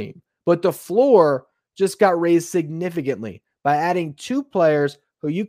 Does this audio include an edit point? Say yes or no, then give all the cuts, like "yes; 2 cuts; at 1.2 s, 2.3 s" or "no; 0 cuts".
no; 0 cuts